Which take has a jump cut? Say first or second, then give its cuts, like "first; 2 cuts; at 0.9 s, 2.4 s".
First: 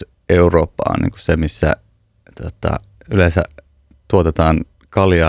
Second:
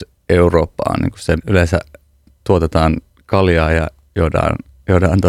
second; 1 cut; at 1.4 s